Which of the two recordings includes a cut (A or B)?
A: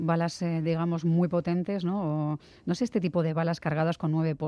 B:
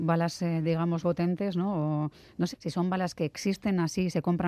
B